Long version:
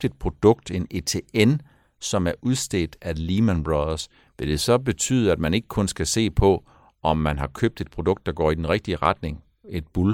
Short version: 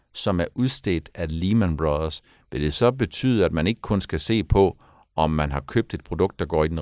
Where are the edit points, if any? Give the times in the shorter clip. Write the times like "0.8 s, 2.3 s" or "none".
none